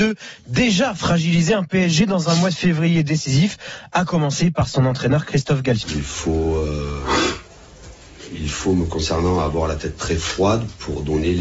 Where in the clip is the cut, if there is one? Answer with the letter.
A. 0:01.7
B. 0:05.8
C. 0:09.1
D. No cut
B